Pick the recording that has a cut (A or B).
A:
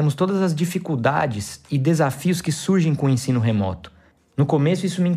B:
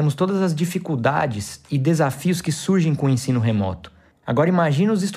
A